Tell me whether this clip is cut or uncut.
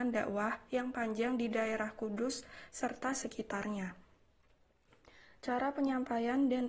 uncut